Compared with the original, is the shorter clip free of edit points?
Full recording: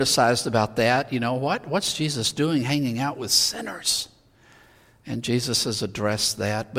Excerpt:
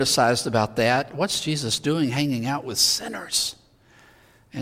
no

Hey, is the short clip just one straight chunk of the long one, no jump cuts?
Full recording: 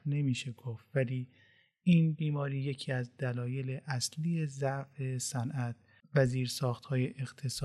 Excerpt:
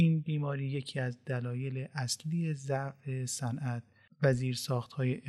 yes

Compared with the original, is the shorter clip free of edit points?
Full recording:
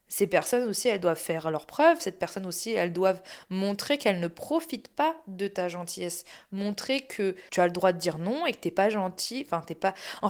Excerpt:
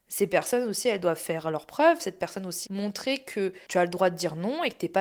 no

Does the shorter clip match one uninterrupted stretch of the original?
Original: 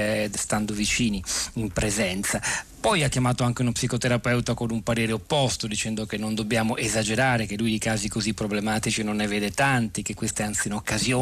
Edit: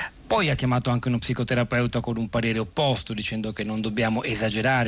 yes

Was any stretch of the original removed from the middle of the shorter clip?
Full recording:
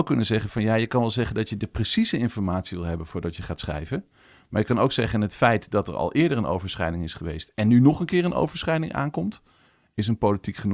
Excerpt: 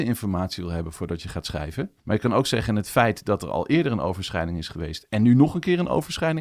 yes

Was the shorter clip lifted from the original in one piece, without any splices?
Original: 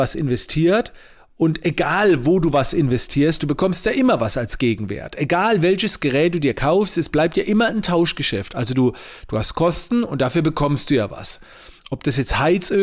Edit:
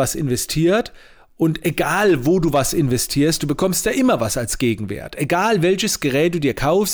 yes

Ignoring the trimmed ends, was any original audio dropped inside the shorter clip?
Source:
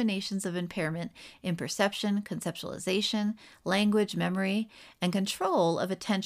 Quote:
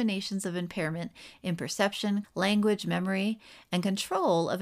yes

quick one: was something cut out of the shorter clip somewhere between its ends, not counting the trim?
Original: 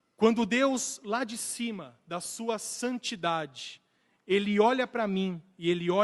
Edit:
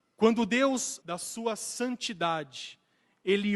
yes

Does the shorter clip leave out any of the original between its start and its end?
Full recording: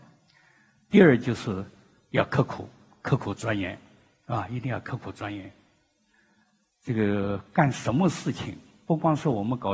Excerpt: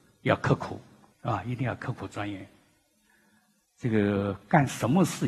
yes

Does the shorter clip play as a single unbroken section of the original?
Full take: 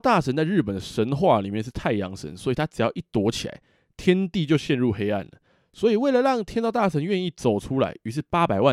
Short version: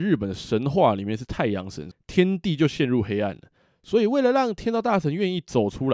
no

